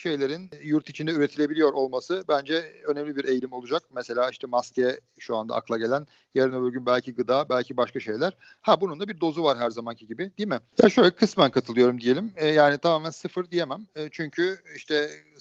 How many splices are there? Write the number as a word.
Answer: one